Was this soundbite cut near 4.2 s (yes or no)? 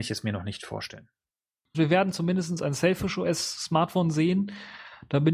no